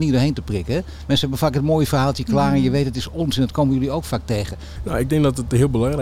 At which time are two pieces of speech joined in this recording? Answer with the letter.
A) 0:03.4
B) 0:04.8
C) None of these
B